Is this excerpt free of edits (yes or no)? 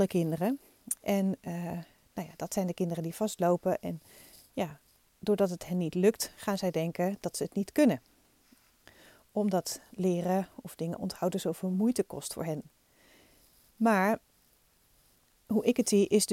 yes